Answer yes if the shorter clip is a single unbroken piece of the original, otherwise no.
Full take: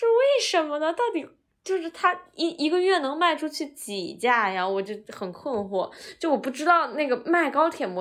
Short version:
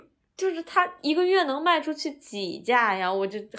no